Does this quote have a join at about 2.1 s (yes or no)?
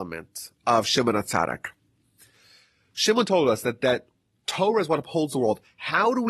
no